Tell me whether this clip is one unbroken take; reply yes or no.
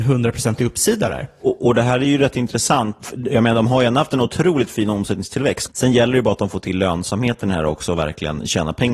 no